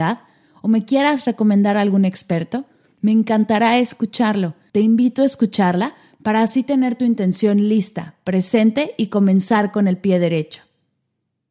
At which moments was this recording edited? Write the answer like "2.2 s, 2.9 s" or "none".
4.7 s